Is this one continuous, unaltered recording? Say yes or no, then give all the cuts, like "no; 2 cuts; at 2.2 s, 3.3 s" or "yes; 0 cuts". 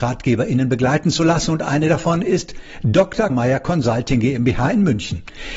no; 1 cut; at 3.3 s